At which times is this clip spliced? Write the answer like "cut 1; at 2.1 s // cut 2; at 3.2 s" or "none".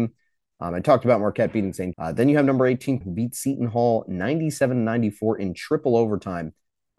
cut 1; at 1.9 s // cut 2; at 3.0 s